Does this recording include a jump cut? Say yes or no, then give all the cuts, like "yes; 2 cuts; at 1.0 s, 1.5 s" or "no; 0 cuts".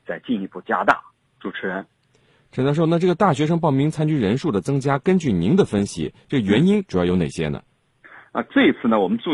no; 0 cuts